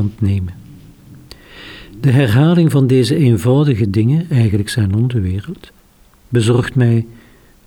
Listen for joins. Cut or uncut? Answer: uncut